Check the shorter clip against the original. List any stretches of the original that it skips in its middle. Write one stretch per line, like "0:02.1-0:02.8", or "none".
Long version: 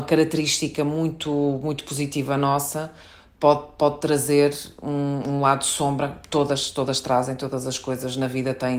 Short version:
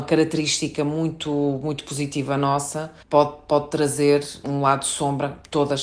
0:03.0-0:03.3
0:04.7-0:05.2